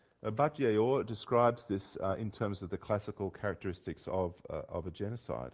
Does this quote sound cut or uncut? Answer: uncut